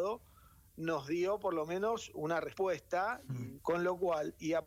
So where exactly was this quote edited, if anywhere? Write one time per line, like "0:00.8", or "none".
0:03.6